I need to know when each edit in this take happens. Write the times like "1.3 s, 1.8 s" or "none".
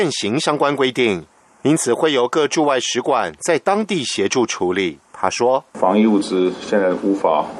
5.1 s